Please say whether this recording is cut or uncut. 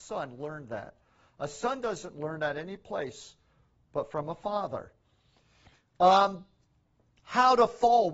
uncut